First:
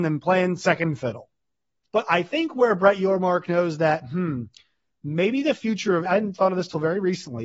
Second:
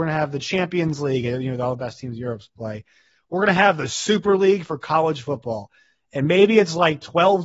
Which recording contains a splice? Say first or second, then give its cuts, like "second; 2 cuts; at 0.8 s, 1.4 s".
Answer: first; 2 cuts; at 1.9 s, 6.1 s